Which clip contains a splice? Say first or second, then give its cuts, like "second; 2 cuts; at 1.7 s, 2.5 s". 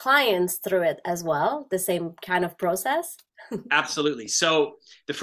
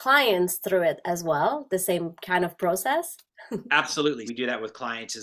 second; 1 cut; at 4.3 s